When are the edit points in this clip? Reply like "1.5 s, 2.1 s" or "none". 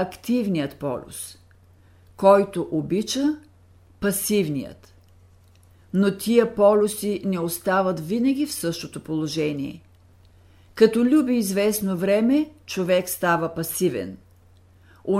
none